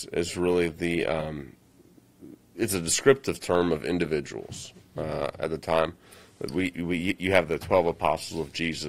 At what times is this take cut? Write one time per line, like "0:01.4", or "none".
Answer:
none